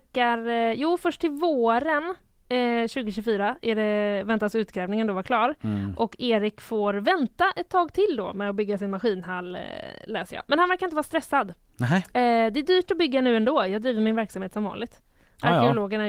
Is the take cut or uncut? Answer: uncut